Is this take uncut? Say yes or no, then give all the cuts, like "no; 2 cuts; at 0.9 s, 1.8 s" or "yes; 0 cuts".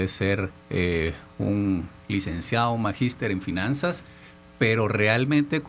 yes; 0 cuts